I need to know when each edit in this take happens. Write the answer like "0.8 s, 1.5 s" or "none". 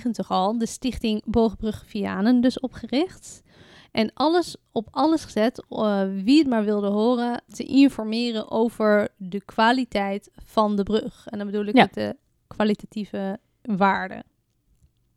none